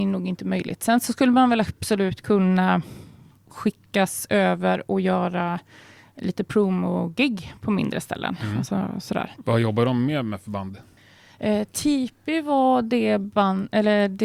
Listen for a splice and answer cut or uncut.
cut